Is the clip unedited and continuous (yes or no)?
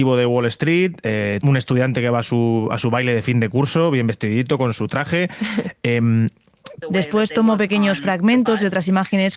no